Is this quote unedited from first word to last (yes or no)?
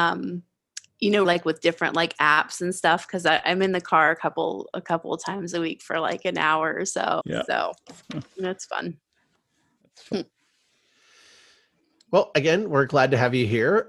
no